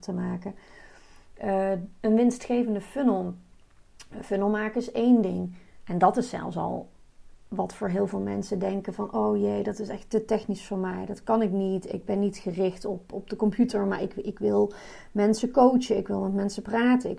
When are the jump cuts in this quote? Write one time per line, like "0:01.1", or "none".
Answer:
none